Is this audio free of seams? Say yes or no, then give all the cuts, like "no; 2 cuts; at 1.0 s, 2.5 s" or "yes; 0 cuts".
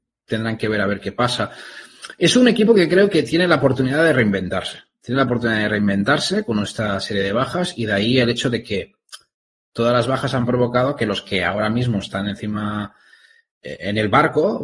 yes; 0 cuts